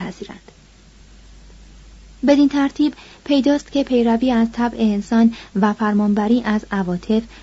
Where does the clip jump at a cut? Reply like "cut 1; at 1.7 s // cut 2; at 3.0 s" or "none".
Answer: none